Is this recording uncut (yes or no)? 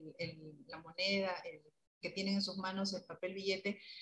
yes